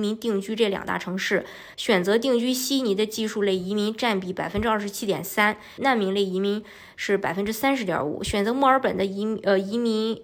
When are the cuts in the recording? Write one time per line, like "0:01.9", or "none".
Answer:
0:01.7
0:05.8

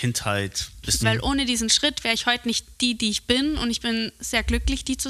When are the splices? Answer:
0:01.0

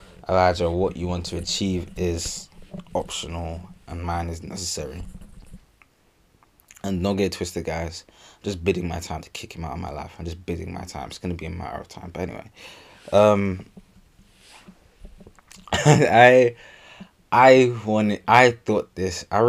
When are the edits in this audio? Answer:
none

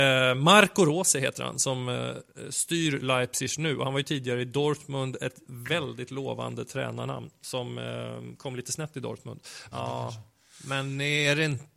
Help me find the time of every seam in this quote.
0:09.7

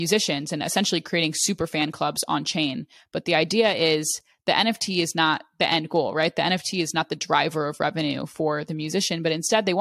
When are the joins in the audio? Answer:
none

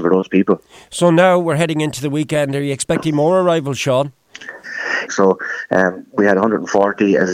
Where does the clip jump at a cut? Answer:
0:05.1

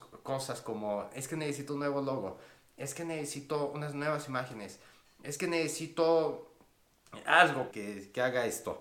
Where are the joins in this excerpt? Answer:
0:07.7

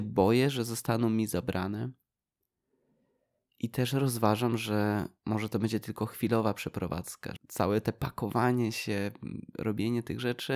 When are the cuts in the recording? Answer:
0:07.4

